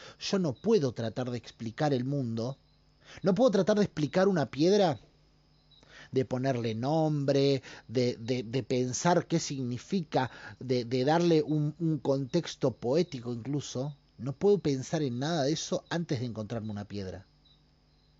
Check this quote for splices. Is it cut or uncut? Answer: uncut